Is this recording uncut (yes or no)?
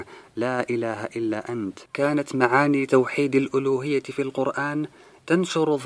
no